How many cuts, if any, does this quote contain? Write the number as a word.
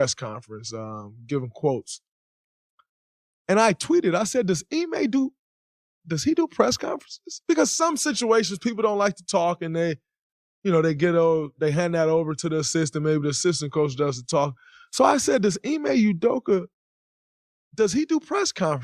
zero